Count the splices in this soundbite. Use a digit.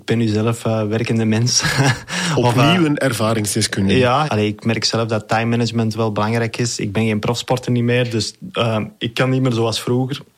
1